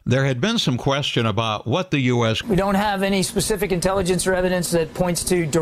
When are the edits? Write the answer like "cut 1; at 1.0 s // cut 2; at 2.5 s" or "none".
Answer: cut 1; at 2.4 s